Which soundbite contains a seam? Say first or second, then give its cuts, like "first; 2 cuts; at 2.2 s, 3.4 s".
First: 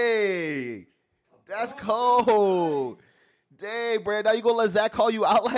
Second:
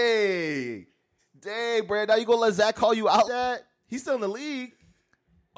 second; 2 cuts; at 1.2 s, 3.2 s